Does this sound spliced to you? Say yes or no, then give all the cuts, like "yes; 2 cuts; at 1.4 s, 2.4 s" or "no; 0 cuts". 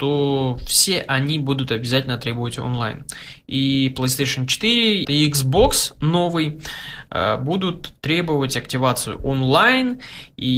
yes; 1 cut; at 5.0 s